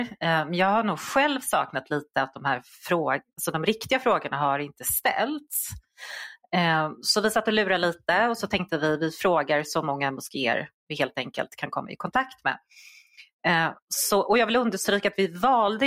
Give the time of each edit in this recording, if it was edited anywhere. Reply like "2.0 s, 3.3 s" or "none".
none